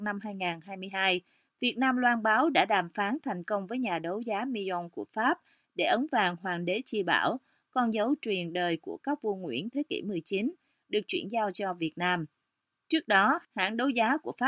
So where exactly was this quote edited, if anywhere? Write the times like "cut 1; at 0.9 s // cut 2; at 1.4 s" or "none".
none